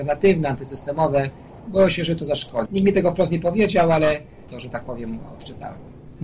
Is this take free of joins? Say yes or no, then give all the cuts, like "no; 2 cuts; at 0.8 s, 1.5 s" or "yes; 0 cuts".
no; 2 cuts; at 2.7 s, 4.5 s